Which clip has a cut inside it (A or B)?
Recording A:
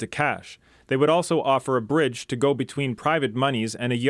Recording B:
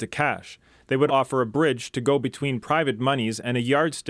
B